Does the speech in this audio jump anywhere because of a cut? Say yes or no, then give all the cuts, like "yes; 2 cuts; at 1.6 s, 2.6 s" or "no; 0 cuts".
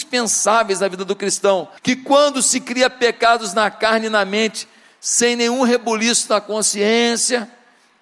yes; 1 cut; at 1.8 s